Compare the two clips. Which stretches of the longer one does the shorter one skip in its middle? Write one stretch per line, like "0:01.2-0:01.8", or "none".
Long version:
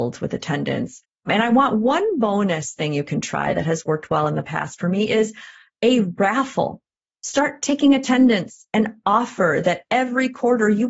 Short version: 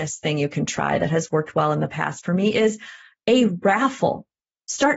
none